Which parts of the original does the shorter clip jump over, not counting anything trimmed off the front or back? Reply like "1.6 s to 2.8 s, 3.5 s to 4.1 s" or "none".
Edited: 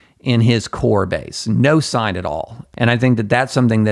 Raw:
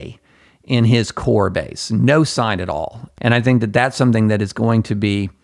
none